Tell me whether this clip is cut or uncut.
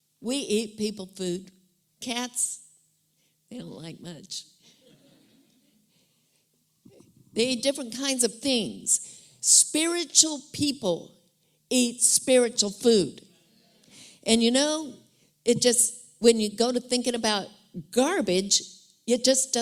uncut